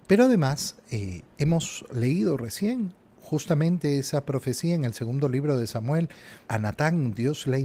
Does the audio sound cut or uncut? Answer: cut